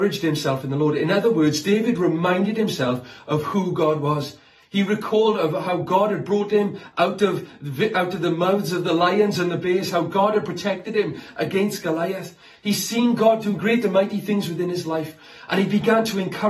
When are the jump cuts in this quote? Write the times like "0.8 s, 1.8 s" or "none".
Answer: 13.6 s